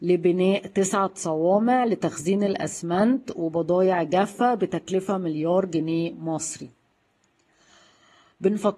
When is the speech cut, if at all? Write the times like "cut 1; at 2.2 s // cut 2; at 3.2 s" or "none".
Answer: none